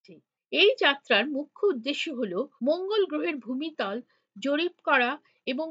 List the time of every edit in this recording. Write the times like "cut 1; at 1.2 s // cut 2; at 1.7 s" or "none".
cut 1; at 2.6 s